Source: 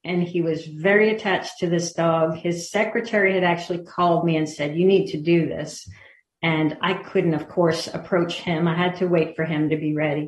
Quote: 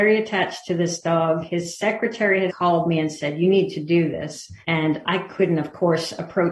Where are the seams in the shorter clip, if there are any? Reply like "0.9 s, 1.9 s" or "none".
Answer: 2.5 s, 4.6 s